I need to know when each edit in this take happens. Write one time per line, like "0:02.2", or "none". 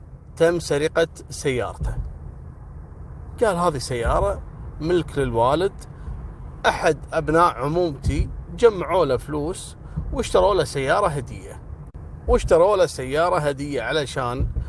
0:03.3